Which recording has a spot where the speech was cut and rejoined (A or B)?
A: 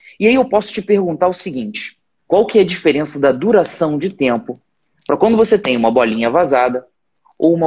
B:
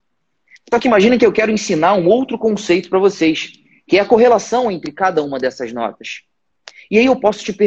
A